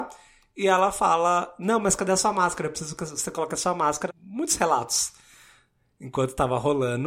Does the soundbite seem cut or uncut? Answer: cut